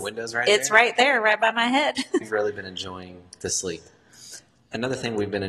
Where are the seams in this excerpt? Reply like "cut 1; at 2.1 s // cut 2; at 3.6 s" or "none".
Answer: cut 1; at 2.2 s